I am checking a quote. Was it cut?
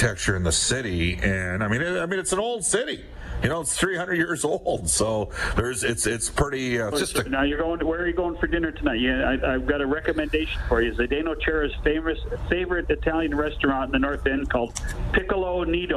yes; 1 cut; at 6.9 s

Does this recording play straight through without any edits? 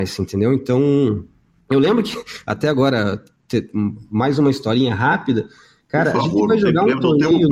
yes; 0 cuts

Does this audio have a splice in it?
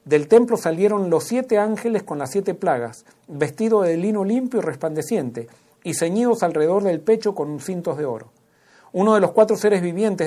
no; 0 cuts

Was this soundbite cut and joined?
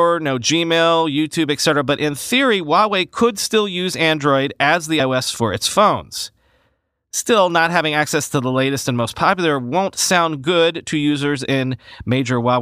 no; 0 cuts

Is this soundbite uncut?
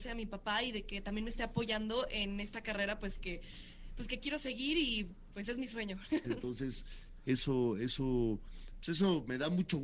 no; 1 cut; at 6.2 s

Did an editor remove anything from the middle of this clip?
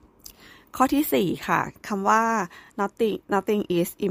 no; 0 cuts

